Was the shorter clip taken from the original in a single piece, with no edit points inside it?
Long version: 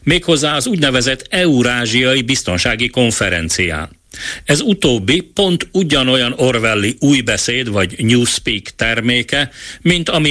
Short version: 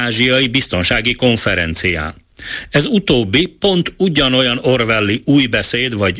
yes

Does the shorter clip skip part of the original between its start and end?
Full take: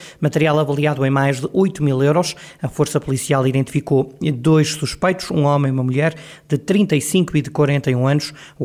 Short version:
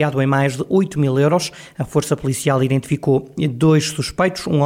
no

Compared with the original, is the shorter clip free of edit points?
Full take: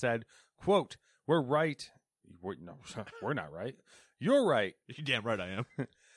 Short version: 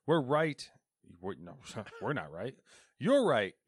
yes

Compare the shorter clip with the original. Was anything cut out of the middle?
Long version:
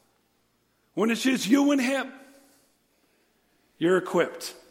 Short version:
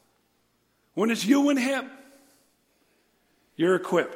yes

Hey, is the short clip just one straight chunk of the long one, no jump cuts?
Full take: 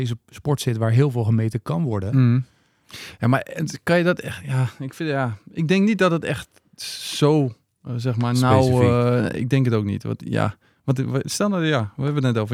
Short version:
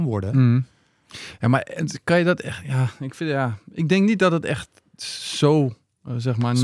yes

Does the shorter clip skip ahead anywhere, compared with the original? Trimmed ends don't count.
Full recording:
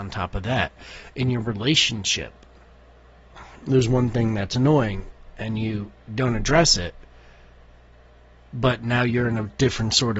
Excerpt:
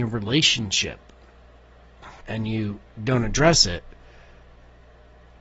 yes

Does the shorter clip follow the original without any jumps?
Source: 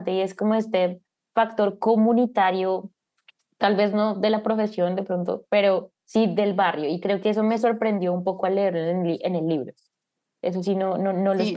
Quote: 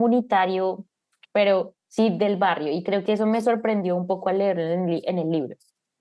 no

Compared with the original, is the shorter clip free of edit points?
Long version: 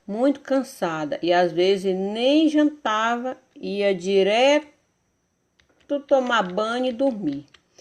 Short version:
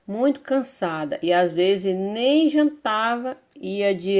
yes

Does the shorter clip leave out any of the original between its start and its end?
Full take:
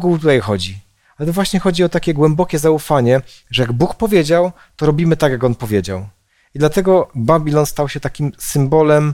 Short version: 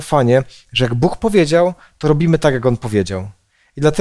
no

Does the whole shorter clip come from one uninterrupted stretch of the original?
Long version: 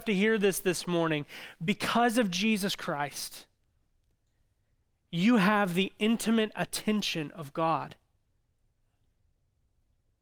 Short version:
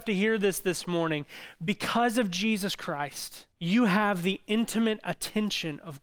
no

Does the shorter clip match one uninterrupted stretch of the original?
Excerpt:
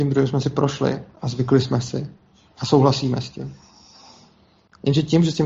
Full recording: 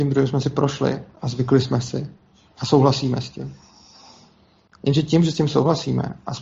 yes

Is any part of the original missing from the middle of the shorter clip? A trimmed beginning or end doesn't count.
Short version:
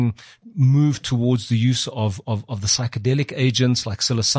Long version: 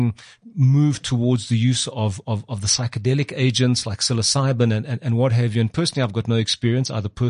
no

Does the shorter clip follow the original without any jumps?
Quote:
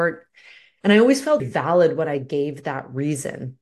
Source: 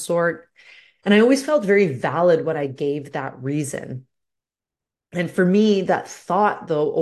no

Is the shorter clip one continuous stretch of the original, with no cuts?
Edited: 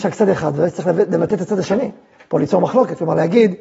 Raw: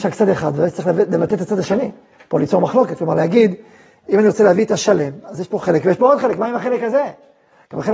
yes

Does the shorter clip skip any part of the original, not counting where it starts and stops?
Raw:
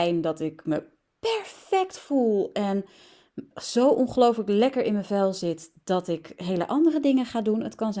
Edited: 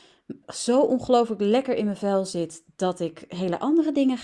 no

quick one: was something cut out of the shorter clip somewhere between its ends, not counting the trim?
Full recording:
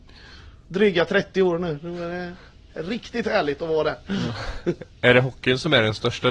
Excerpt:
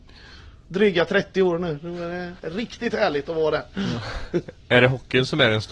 yes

